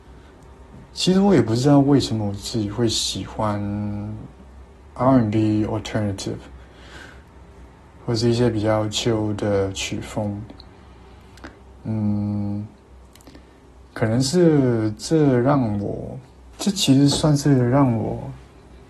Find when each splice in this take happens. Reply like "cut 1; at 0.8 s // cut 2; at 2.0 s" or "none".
cut 1; at 16.5 s